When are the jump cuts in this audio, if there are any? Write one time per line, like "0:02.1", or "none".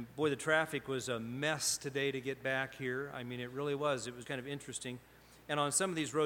0:04.2